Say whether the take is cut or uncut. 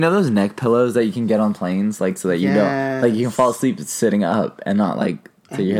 uncut